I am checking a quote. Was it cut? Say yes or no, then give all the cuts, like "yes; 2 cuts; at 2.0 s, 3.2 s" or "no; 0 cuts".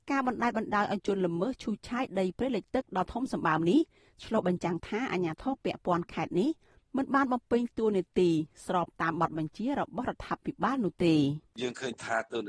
no; 0 cuts